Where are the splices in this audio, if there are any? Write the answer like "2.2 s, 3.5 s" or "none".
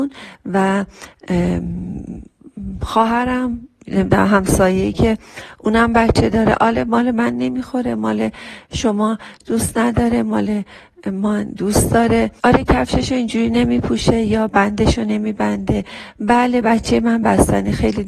12.4 s